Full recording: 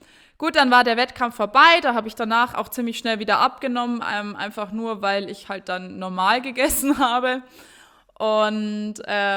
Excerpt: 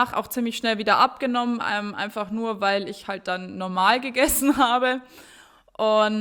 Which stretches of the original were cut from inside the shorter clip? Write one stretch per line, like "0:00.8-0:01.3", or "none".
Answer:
none

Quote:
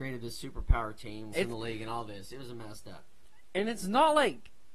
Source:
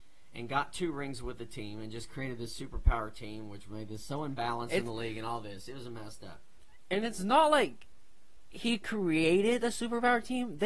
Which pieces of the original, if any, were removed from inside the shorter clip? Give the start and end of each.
0:03.5-0:04.7

